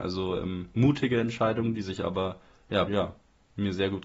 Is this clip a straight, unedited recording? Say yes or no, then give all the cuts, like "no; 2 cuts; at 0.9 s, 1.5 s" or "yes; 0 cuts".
no; 1 cut; at 2.9 s